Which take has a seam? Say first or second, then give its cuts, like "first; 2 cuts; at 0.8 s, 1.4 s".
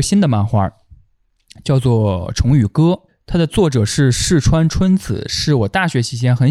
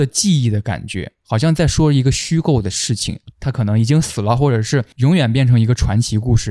second; 1 cut; at 3.3 s